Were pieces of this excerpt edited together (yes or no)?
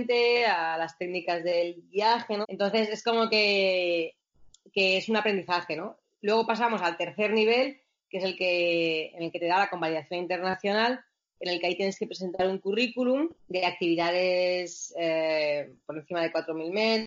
yes